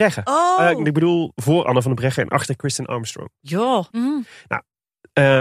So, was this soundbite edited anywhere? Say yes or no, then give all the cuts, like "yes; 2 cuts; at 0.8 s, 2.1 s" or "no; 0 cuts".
yes; 1 cut; at 3.9 s